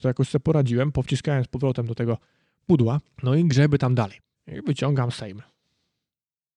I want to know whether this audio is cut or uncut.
cut